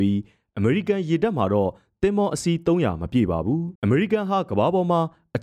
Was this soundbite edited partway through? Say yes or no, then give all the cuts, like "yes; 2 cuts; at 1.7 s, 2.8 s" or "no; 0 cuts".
yes; 1 cut; at 3.8 s